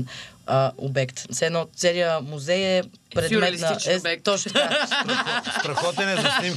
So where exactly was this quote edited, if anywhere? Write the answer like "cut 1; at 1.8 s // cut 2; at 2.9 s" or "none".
none

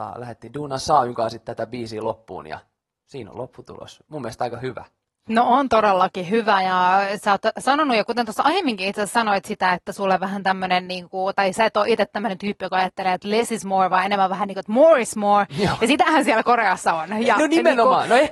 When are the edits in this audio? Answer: none

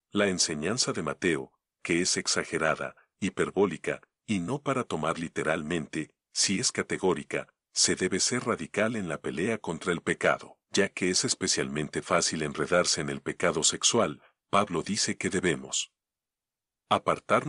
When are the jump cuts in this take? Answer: cut 1; at 10.6 s

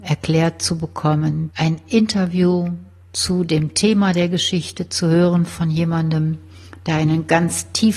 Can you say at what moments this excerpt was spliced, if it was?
cut 1; at 1.5 s

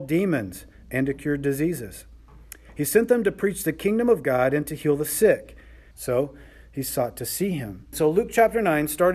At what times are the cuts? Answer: cut 1; at 5.9 s // cut 2; at 7.9 s

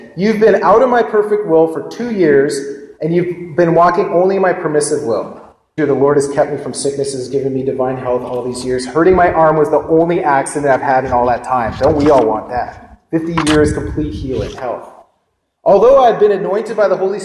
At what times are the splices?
cut 1; at 5.8 s

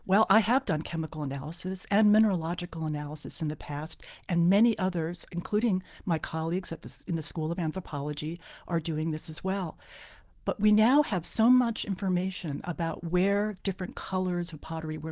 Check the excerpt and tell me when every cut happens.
none

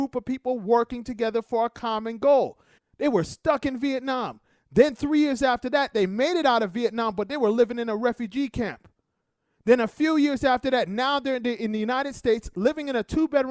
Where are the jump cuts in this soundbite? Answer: cut 1; at 2.8 s

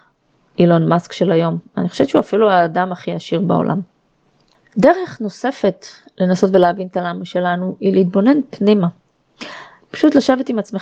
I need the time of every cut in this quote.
cut 1; at 9.8 s

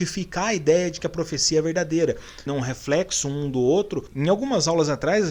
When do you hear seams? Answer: cut 1; at 2.5 s // cut 2; at 4.1 s

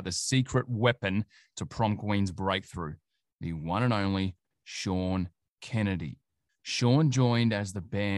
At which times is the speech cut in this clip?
none

